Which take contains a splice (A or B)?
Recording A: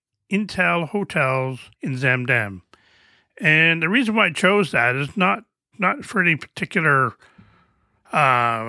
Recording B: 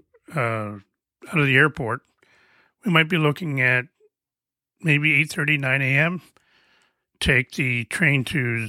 A